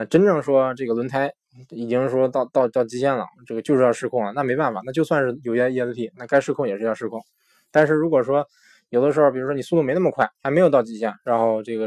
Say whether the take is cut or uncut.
uncut